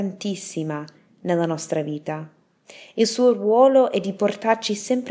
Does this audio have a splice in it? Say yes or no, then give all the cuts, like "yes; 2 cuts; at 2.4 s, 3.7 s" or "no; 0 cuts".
no; 0 cuts